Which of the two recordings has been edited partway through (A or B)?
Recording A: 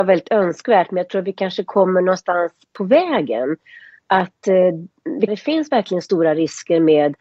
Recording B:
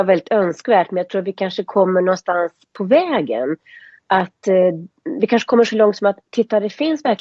A